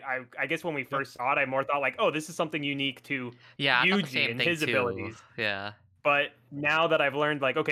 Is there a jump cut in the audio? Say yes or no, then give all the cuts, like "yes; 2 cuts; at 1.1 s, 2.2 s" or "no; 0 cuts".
no; 0 cuts